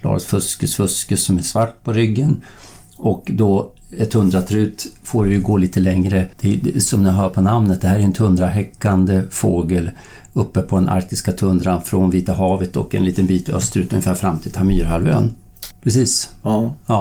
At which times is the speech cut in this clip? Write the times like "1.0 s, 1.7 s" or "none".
6.3 s, 15.7 s

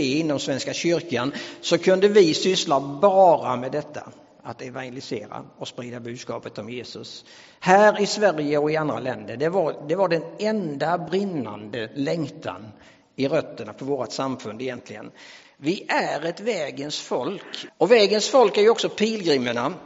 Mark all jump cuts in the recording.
15.4 s, 17.7 s

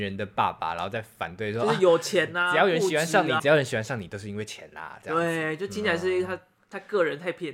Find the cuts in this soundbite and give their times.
3.4 s

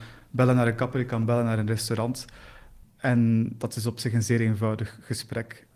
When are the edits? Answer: none

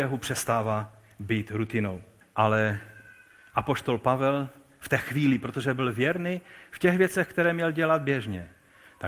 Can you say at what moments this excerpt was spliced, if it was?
2.2 s

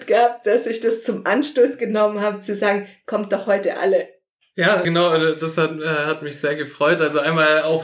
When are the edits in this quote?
none

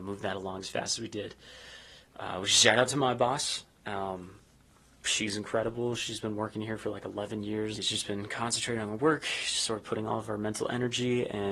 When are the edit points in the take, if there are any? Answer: 7.7 s

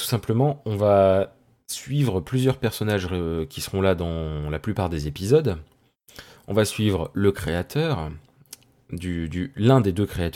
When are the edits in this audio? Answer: none

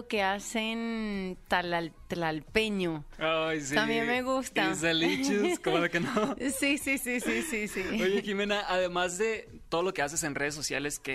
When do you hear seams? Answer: none

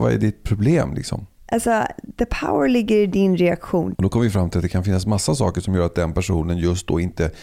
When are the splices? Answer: 1.4 s, 3.9 s

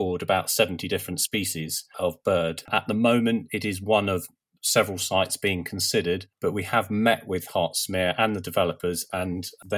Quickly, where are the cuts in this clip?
2.7 s, 6.3 s

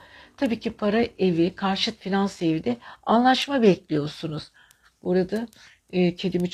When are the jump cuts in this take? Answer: none

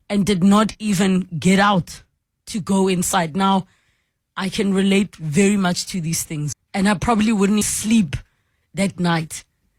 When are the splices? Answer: 6.5 s, 7.6 s

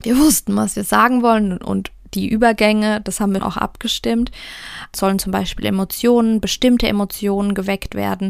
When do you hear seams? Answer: 3.4 s, 4.9 s

